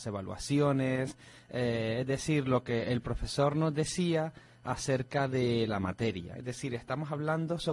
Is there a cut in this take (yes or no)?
yes